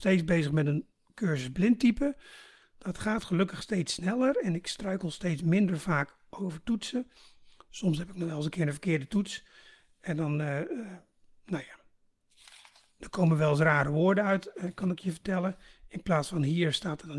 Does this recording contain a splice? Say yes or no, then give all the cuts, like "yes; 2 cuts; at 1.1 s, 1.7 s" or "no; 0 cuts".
no; 0 cuts